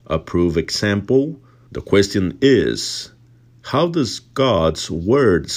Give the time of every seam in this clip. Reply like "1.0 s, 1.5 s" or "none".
1.7 s